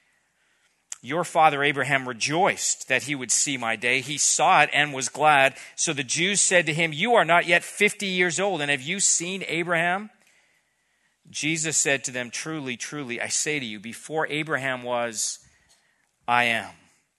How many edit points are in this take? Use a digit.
0